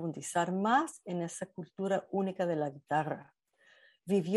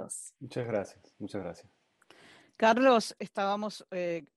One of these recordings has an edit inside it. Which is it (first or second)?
second